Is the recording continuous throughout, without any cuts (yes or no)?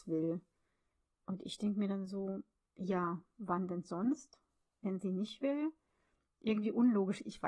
yes